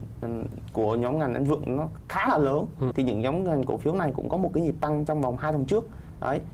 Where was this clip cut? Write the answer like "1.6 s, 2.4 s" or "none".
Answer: 2.9 s